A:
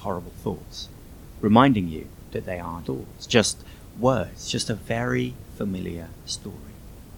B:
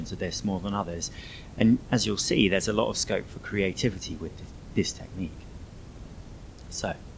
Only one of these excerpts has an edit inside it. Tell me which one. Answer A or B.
A